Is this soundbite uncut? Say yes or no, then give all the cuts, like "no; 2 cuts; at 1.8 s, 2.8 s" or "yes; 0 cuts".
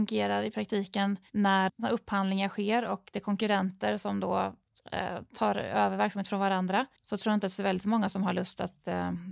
no; 2 cuts; at 1.7 s, 7.0 s